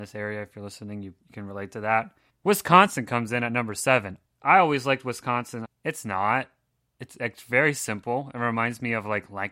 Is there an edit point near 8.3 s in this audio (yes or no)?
no